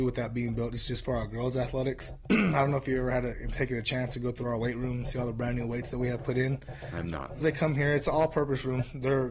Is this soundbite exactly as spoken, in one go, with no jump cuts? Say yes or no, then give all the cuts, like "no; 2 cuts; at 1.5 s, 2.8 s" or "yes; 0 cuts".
no; 1 cut; at 7.4 s